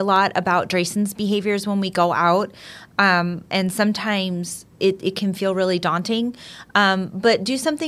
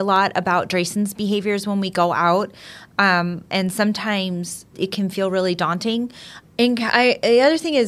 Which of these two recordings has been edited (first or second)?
second